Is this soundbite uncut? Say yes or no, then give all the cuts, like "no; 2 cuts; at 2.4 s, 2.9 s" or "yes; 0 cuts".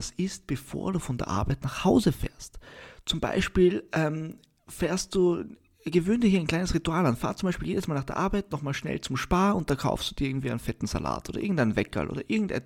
yes; 0 cuts